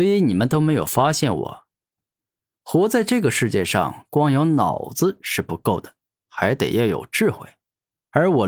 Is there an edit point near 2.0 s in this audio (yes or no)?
yes